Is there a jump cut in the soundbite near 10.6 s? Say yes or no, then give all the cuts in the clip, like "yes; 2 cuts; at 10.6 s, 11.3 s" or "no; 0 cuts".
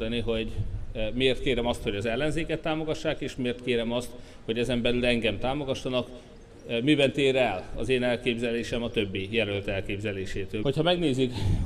yes; 1 cut; at 10.6 s